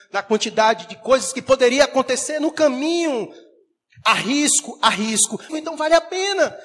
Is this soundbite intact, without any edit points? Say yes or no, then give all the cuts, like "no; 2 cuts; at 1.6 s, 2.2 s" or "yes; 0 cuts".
no; 2 cuts; at 3.9 s, 5.5 s